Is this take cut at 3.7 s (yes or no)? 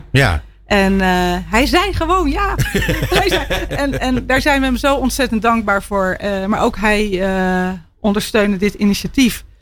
yes